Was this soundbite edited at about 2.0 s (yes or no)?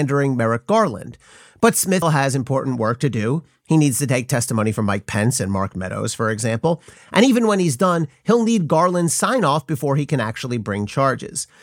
yes